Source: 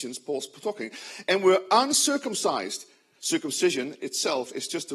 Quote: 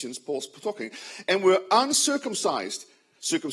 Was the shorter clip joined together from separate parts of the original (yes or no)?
no